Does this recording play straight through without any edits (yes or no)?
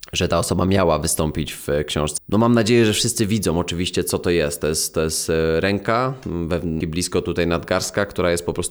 no